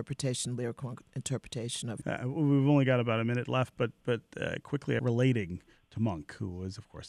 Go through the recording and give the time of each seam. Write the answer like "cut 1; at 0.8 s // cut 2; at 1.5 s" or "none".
cut 1; at 2.0 s // cut 2; at 5.0 s